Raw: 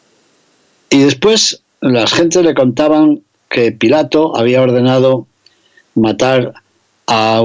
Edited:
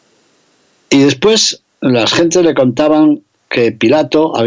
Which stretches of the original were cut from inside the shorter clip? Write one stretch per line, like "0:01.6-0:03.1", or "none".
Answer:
none